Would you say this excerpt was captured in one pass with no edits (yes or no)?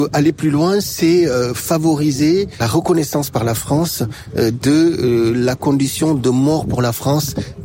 yes